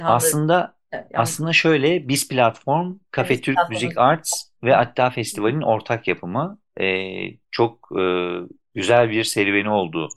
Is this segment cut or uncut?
uncut